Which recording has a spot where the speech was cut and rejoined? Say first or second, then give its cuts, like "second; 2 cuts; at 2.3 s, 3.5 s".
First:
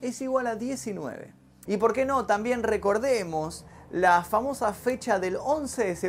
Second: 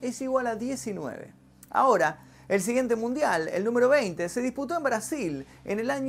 first; 1 cut; at 1.7 s